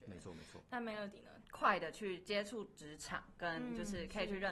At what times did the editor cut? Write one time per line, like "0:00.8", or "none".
0:01.4